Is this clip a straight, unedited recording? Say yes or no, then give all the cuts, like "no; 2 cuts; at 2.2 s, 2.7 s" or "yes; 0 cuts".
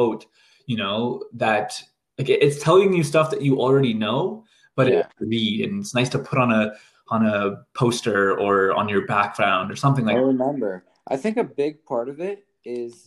no; 1 cut; at 5.2 s